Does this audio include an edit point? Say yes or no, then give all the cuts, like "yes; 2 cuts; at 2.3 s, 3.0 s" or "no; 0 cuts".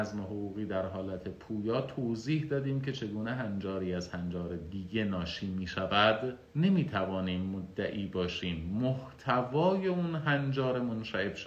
yes; 1 cut; at 6.5 s